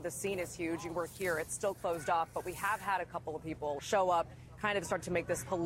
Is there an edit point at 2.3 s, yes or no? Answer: no